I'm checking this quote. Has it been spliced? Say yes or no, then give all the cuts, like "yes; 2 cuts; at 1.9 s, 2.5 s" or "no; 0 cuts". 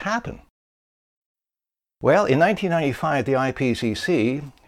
no; 0 cuts